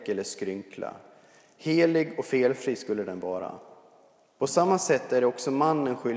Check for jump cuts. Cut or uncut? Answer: uncut